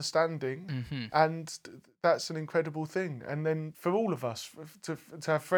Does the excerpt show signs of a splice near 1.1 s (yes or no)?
no